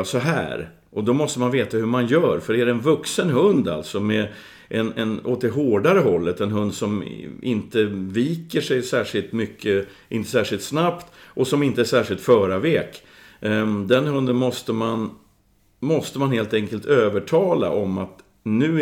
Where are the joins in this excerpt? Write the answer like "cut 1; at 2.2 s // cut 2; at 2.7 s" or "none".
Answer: none